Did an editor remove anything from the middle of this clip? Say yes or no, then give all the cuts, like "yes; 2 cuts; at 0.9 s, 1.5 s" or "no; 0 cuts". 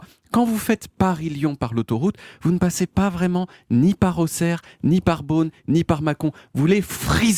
no; 0 cuts